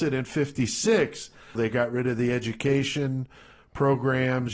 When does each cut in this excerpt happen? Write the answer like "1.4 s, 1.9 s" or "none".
1.6 s